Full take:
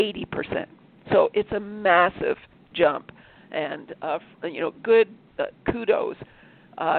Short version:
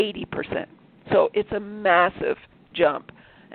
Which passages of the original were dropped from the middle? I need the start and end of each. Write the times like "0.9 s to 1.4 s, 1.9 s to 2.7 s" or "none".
none